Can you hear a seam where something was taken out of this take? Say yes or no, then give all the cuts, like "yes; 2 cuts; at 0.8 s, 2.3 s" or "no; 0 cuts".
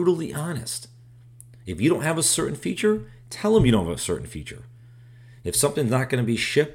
no; 0 cuts